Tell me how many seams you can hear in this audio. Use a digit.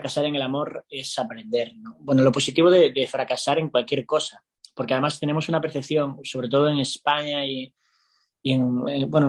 0